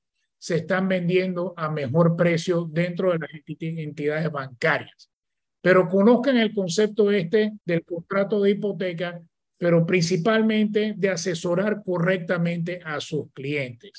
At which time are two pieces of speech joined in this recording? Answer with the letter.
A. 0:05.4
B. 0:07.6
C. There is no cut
B